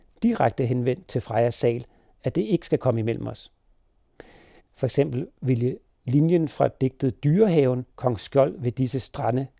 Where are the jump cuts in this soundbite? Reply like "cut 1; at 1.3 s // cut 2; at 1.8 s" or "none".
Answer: cut 1; at 4.6 s // cut 2; at 7.9 s